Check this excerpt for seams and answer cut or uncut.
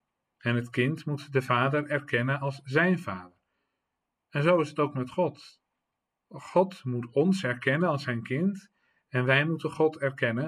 uncut